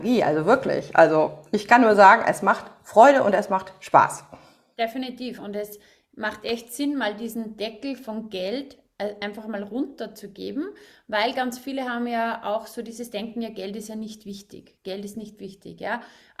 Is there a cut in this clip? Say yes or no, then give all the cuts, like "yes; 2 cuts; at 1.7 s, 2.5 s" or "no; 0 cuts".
no; 0 cuts